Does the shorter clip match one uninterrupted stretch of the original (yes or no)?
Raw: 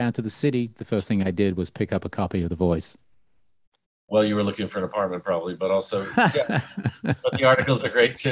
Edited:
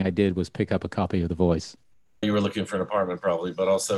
no